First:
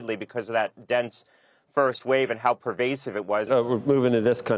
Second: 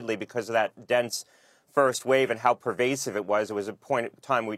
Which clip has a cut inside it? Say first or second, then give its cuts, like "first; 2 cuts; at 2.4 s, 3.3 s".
first; 1 cut; at 3.5 s